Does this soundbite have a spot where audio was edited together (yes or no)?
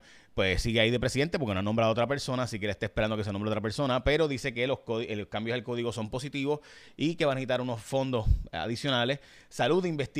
no